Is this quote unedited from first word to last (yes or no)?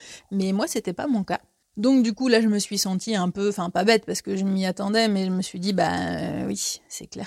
no